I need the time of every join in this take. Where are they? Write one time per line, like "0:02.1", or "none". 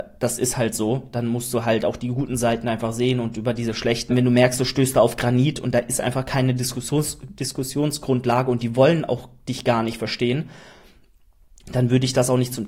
0:04.1